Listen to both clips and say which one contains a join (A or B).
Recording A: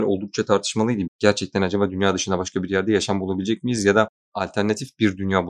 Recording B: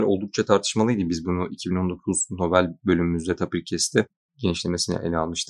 A